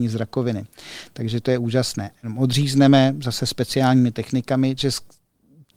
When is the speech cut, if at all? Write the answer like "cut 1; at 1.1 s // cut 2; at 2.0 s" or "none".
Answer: cut 1; at 2.1 s // cut 2; at 4.8 s